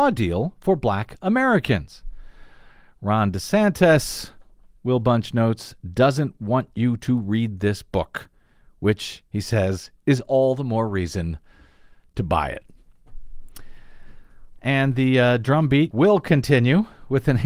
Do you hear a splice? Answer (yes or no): yes